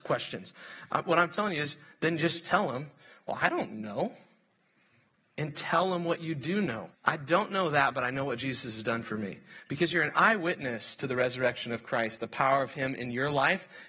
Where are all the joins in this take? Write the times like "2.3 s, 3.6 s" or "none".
6.9 s